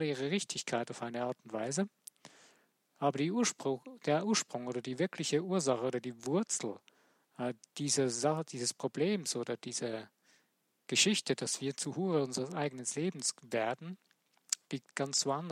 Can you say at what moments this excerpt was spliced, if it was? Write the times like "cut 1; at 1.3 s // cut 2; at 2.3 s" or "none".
none